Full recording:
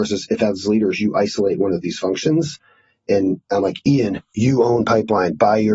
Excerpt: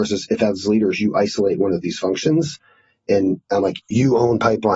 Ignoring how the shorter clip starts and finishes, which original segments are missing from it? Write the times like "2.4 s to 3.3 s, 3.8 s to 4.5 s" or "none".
3.8 s to 4.3 s